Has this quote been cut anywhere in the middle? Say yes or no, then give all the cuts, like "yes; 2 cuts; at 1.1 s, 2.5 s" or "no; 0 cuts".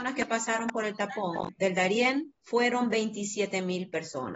yes; 1 cut; at 2.4 s